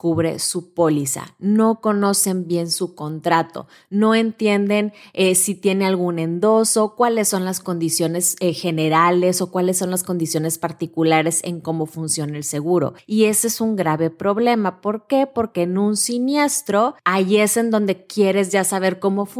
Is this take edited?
no; 0 cuts

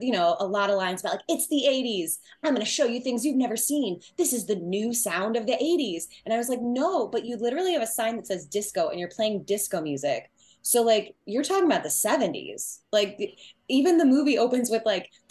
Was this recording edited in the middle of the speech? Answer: no; 0 cuts

